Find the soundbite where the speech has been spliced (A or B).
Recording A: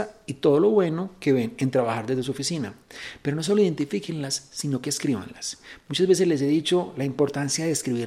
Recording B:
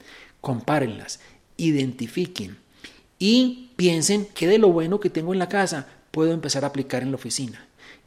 B